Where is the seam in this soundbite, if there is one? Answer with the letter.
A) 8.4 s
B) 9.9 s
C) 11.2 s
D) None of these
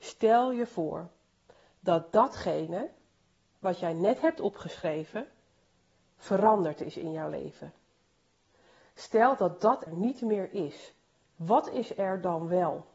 B